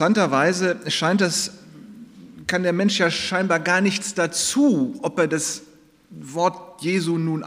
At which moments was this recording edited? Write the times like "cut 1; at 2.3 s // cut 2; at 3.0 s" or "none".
none